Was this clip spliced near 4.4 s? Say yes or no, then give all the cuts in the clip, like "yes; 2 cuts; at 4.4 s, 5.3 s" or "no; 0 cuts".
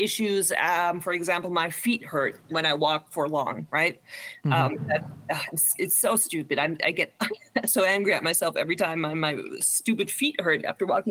no; 0 cuts